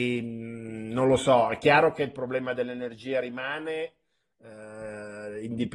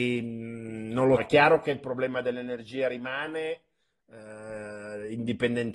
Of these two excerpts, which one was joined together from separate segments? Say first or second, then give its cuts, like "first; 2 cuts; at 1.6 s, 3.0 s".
second; 1 cut; at 1.2 s